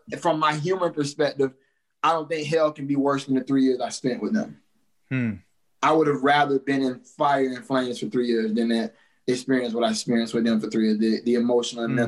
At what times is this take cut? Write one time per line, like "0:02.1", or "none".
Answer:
0:05.8